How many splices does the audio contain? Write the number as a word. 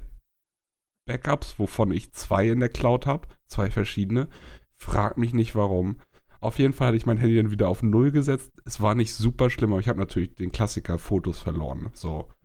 zero